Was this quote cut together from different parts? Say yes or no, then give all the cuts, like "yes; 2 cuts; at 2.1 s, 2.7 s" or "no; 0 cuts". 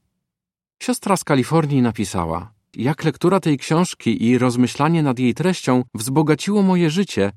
yes; 2 cuts; at 2.7 s, 5.9 s